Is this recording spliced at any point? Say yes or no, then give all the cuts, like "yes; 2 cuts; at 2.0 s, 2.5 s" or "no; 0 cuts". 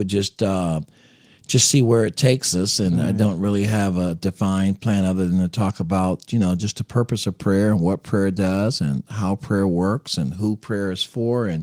no; 0 cuts